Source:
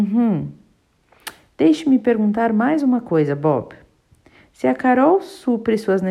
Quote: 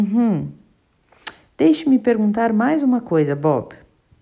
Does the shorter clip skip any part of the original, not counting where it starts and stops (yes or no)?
no